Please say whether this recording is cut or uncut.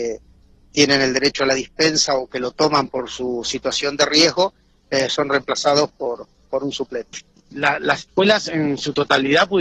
uncut